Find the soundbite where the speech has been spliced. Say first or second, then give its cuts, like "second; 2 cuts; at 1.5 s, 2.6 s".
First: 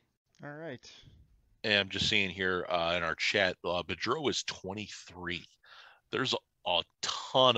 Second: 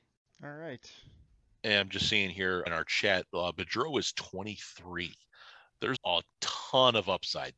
second; 2 cuts; at 2.7 s, 6.0 s